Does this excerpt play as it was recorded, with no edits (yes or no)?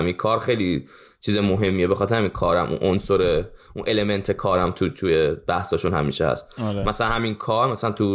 yes